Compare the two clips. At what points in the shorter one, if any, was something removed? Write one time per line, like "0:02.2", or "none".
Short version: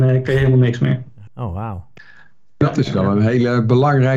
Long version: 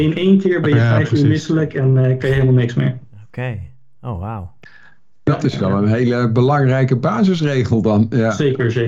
0:01.3